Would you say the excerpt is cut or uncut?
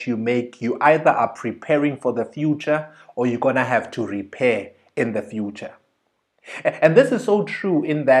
uncut